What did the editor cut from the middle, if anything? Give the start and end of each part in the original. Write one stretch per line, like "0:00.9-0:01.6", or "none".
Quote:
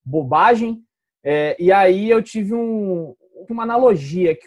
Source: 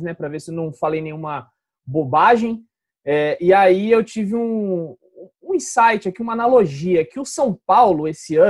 0:05.3-0:06.2